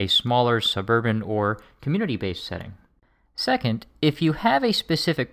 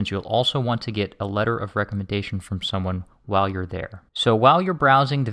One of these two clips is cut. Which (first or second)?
second